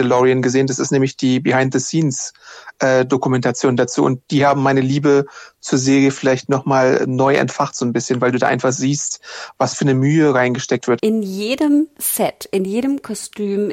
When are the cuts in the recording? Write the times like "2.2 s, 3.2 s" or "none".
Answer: 11.0 s